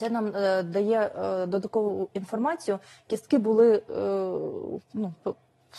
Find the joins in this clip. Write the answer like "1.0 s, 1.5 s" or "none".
none